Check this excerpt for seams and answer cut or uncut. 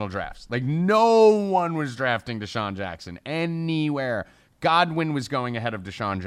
uncut